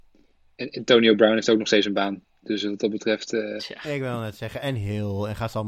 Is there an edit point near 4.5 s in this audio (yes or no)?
no